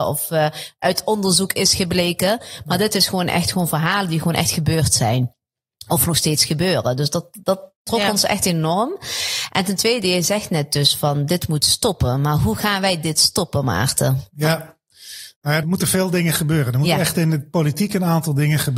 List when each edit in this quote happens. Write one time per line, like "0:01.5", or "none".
0:15.6

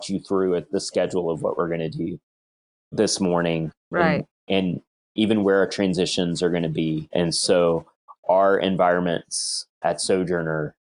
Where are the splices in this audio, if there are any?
none

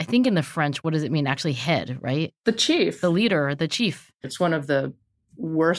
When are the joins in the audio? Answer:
0:04.2

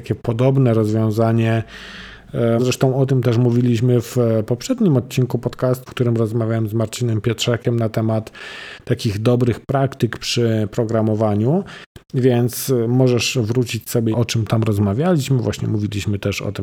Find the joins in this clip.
0:02.6
0:05.9
0:14.1

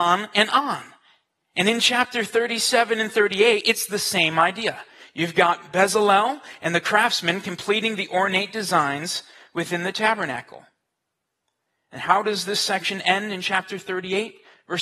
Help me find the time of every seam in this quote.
none

